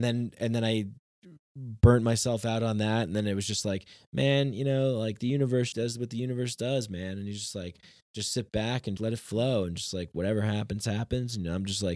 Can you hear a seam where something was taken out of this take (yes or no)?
yes